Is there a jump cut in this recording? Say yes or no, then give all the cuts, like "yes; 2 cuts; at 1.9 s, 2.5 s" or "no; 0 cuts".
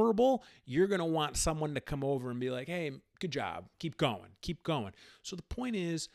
yes; 1 cut; at 3.8 s